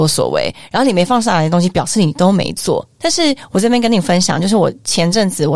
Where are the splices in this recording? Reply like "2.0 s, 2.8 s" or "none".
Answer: none